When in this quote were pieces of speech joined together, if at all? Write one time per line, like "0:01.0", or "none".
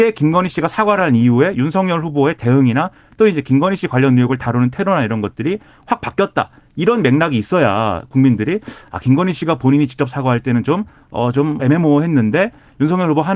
0:11.6